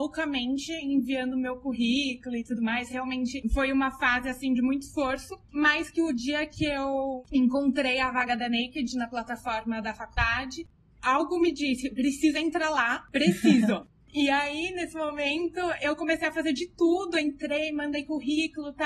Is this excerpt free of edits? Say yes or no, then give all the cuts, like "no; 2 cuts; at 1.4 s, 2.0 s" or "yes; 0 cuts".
yes; 0 cuts